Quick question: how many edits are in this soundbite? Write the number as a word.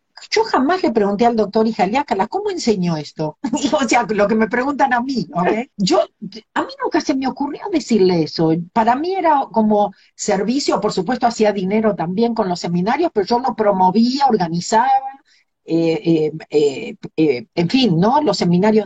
one